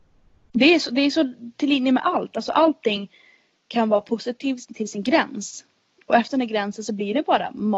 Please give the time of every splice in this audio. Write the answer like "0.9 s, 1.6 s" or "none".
4.7 s